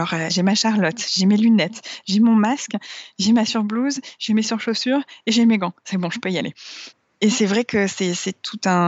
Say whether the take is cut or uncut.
uncut